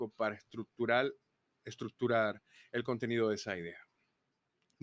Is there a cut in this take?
no; 0 cuts

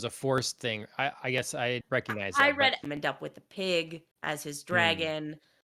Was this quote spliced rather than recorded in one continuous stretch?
yes; 3 cuts; at 1.8 s, 2.8 s, 4.1 s

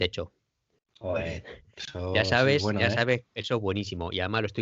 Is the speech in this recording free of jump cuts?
yes; 0 cuts

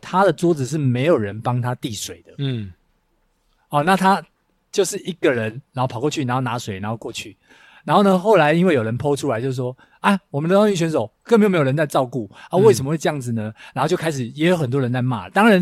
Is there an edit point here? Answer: no; 0 cuts

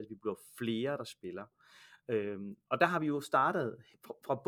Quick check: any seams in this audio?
no; 0 cuts

